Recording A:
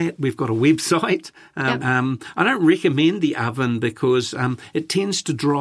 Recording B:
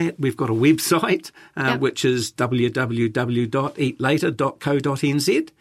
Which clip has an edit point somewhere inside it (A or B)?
A